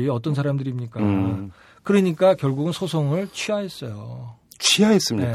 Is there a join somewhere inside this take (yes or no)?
yes